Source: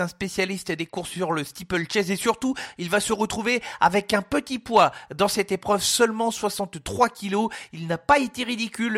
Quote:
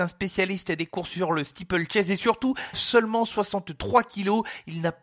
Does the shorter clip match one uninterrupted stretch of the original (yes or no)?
no